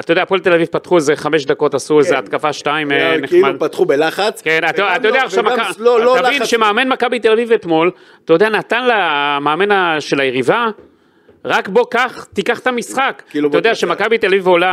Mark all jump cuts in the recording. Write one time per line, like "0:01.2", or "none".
none